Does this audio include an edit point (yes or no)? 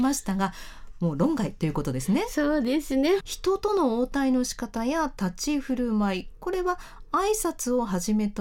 yes